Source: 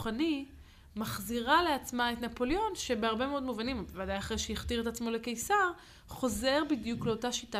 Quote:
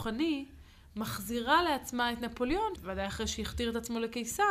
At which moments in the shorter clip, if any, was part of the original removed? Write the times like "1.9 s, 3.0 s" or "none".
2.8 s